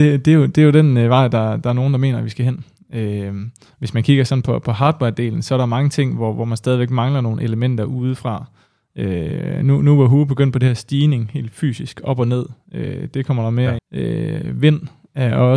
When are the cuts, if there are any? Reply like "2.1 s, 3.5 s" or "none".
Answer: 13.8 s